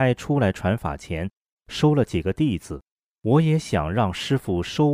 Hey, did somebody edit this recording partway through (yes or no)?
no